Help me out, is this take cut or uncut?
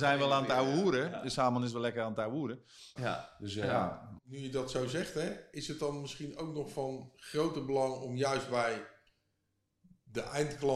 cut